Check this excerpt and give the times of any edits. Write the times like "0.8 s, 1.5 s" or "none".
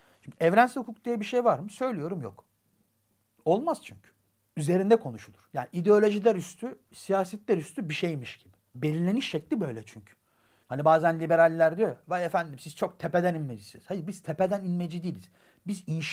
8.7 s, 10.6 s